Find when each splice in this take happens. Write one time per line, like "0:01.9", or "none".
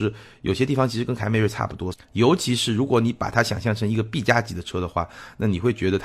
0:01.9